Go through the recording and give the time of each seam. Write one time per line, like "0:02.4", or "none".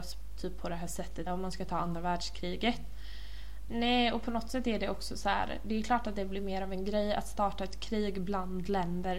0:01.3
0:03.7

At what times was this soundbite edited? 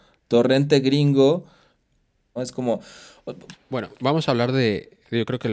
0:02.4
0:03.5

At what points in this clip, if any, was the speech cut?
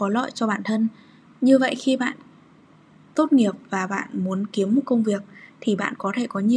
0:01.3

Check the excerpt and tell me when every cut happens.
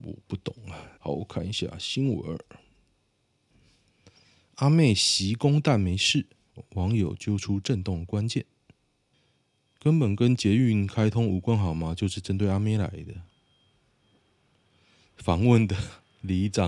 0:01.0

